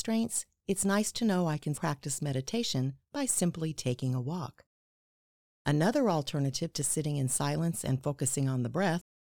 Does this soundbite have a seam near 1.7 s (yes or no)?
yes